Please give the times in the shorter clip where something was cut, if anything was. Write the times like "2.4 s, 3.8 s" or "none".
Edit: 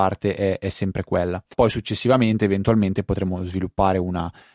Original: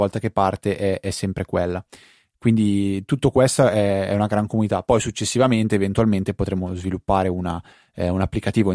1.5 s